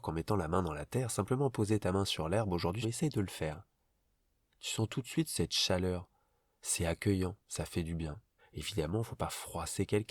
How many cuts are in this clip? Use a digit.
2